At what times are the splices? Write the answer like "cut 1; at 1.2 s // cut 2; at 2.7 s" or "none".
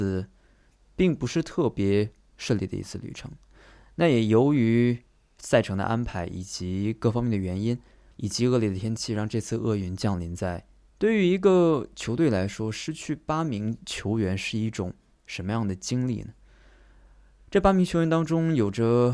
cut 1; at 10.9 s